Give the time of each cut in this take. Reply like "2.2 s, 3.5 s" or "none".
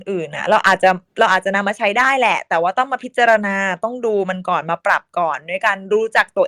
1.1 s